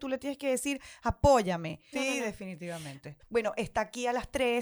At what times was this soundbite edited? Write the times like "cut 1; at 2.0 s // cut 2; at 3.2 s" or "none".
cut 1; at 1.9 s // cut 2; at 3.2 s